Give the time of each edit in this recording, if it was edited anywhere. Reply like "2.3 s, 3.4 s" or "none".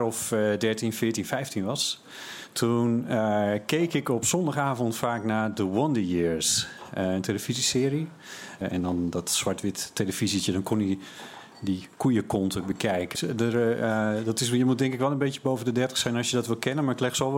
8.6 s, 13.1 s